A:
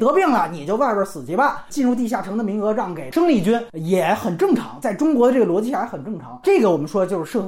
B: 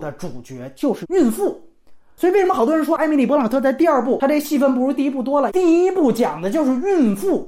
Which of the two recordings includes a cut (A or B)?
B